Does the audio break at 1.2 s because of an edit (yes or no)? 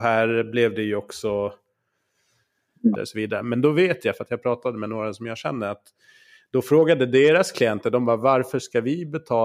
no